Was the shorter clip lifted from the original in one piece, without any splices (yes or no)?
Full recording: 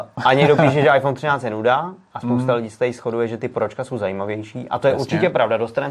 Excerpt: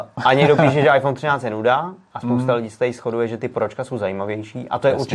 yes